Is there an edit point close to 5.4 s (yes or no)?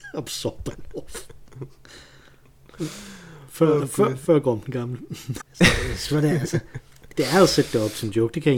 yes